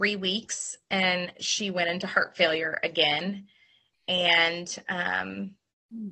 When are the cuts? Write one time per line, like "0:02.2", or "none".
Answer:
none